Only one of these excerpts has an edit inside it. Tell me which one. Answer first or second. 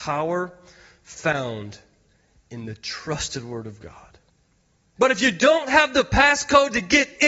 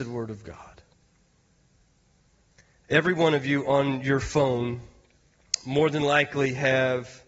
first